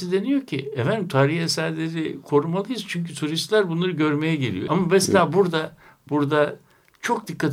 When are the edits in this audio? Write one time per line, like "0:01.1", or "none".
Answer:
0:04.7